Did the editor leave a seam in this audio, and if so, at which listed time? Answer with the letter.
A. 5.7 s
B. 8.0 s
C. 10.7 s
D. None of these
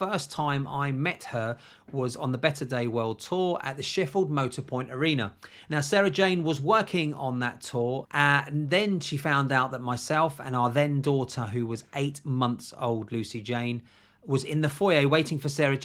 B